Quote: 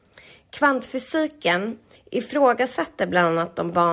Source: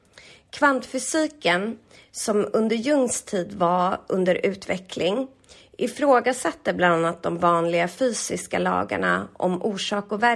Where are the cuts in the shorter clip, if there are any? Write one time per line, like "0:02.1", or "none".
0:01.9